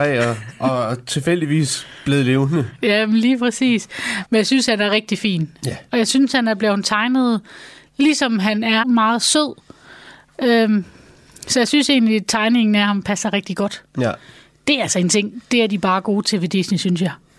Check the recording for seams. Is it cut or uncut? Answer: cut